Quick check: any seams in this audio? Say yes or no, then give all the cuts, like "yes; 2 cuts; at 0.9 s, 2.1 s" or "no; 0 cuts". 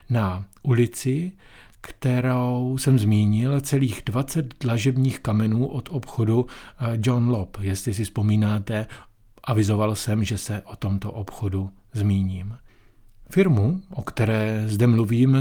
no; 0 cuts